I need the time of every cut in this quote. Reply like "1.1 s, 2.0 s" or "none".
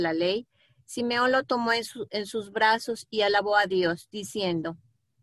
none